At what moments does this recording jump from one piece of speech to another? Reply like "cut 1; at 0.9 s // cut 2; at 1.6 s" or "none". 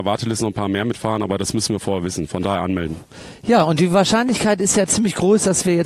none